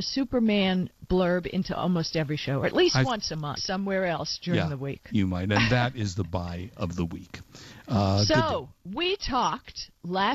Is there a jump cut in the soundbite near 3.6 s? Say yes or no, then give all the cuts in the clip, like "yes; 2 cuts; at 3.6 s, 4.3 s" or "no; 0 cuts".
yes; 1 cut; at 3.6 s